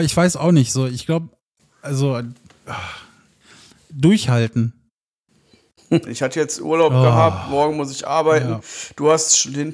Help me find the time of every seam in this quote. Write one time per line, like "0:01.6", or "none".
0:06.1